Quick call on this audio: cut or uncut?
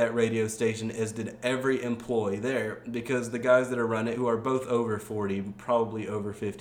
uncut